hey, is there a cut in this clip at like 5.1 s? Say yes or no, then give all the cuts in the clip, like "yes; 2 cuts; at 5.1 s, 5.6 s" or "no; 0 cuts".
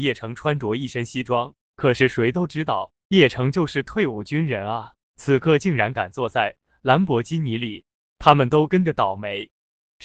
no; 1 cut; at 8.1 s